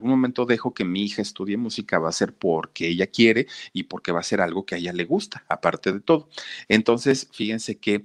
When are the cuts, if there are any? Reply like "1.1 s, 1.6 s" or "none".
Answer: none